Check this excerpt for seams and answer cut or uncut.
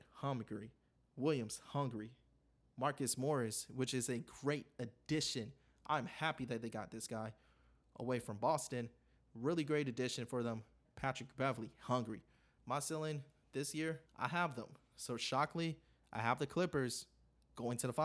cut